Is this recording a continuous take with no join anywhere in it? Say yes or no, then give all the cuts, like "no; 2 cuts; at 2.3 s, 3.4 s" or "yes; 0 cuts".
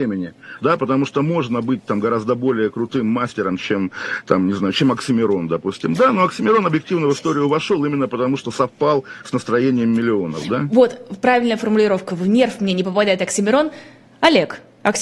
yes; 0 cuts